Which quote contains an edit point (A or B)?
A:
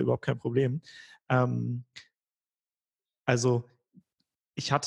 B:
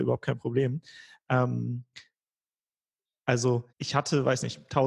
B